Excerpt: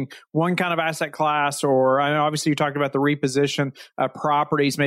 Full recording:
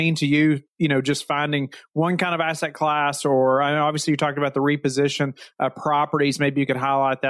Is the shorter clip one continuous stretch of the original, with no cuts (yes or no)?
yes